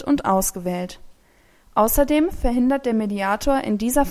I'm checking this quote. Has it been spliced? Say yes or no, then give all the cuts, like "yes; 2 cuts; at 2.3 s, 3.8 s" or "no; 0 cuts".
no; 0 cuts